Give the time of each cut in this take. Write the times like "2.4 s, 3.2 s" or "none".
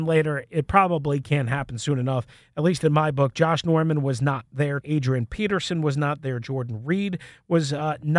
4.8 s